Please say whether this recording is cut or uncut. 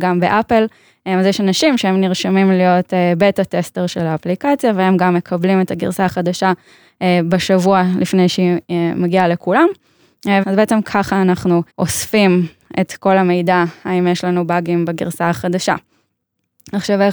cut